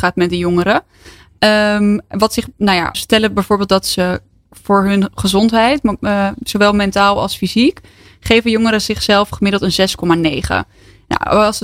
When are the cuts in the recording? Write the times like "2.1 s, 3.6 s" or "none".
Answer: 2.9 s